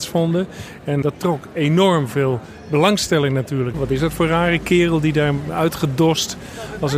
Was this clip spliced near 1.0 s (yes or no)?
yes